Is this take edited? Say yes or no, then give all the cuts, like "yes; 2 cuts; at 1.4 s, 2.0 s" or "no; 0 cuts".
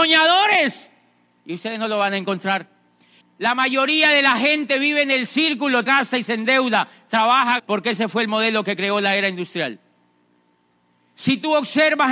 yes; 3 cuts; at 3.2 s, 5.9 s, 7.6 s